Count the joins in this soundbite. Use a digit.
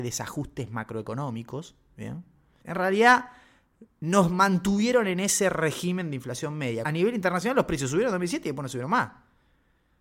2